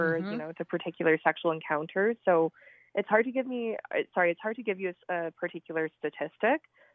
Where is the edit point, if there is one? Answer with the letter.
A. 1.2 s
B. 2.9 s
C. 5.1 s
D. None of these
D